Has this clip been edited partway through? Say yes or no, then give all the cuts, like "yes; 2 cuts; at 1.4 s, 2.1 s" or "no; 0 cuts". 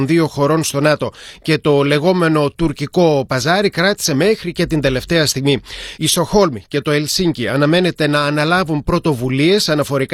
yes; 1 cut; at 6.0 s